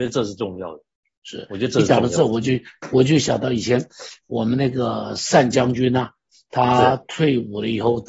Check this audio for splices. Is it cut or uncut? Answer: uncut